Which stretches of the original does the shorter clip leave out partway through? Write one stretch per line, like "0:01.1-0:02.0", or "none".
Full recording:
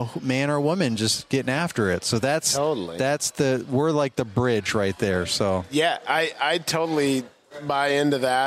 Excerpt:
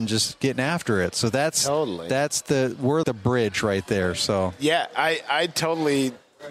0:03.9-0:04.1